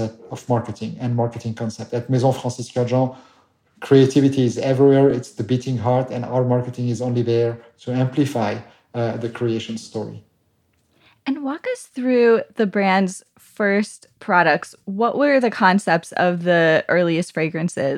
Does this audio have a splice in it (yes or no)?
no